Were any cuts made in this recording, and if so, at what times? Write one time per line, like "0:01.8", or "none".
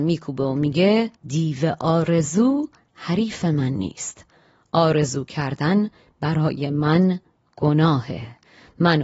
0:01.2